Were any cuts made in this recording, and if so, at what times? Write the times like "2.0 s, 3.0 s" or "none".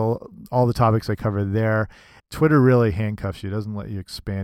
2.2 s